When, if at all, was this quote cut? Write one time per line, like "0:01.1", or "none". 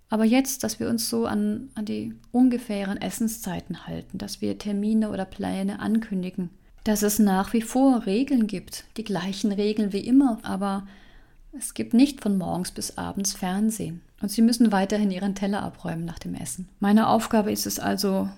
0:10.4
0:14.1
0:16.8